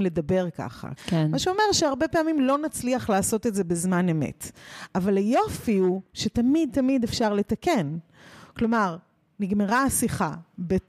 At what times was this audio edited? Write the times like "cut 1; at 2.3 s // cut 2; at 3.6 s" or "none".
cut 1; at 1.0 s